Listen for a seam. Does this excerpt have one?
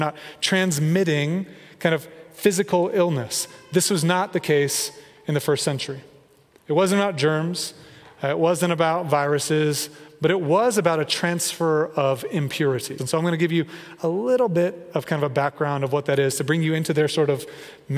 yes; 1 cut; at 13.0 s

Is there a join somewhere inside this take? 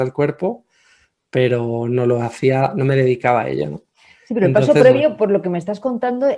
no; 0 cuts

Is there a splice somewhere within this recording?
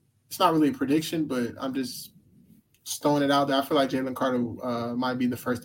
no; 0 cuts

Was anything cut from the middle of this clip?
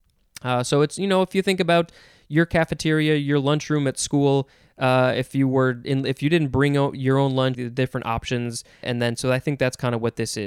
yes; 2 cuts; at 7.5 s, 8.8 s

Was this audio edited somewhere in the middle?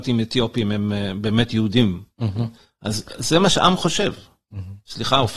no; 0 cuts

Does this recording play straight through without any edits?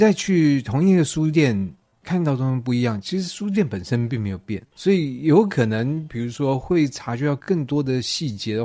no; 1 cut; at 4.7 s

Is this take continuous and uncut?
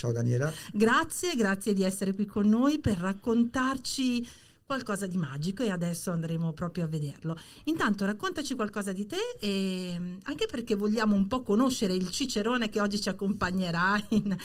yes; 0 cuts

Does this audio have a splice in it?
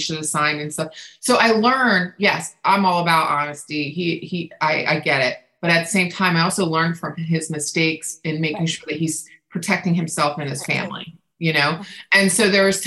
no; 0 cuts

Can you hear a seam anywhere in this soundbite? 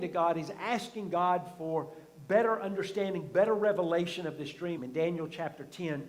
yes; 1 cut; at 4.8 s

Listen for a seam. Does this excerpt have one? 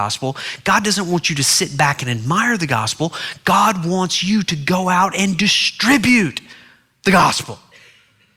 no; 0 cuts

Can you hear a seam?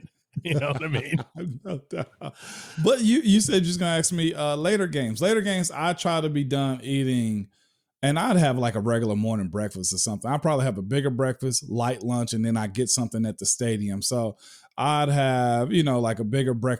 no; 0 cuts

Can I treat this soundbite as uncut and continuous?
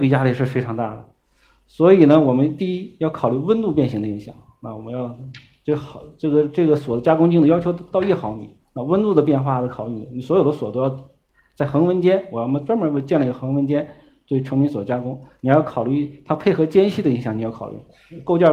yes; 0 cuts

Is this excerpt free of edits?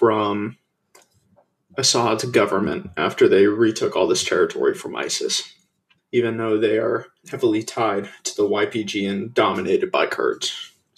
no; 2 cuts; at 6.0 s, 7.2 s

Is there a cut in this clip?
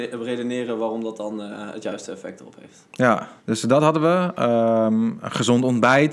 yes; 1 cut; at 3.4 s

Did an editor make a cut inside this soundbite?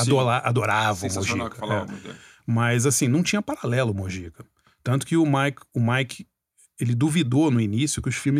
no; 0 cuts

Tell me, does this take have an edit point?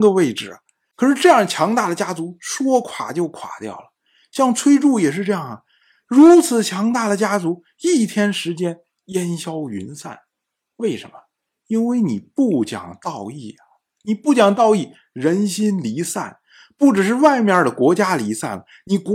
no; 0 cuts

